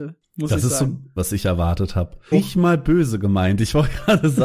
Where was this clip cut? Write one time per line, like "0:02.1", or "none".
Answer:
0:01.2
0:02.3

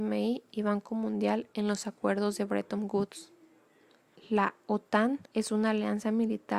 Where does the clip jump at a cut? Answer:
0:04.2
0:05.3

